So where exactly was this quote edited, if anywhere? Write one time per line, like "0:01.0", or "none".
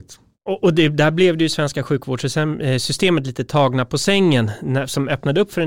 none